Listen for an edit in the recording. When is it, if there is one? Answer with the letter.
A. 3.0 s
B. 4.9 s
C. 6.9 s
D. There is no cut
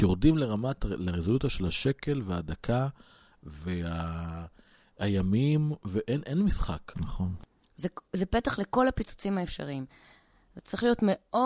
C